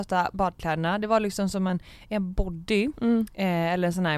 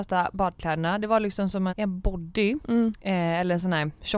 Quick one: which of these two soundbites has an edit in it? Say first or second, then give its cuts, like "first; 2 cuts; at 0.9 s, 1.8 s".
second; 1 cut; at 1.7 s